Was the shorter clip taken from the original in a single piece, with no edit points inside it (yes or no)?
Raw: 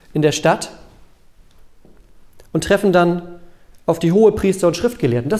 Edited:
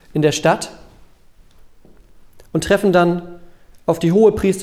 yes